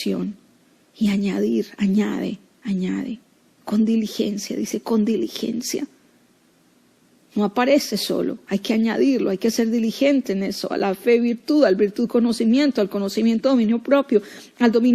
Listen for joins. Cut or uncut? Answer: uncut